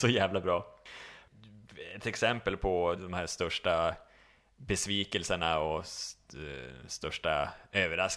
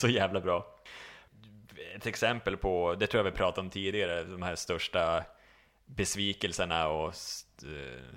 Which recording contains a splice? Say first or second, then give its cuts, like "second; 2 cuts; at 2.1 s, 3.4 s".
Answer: first; 1 cut; at 3.0 s